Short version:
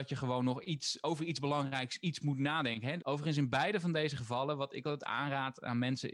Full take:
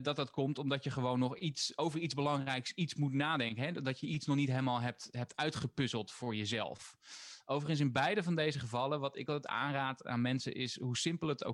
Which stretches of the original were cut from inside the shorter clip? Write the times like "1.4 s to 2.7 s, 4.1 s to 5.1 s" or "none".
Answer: 3.7 s to 7.4 s